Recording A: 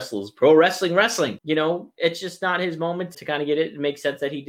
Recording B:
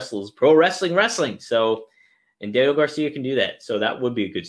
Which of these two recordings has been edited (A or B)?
A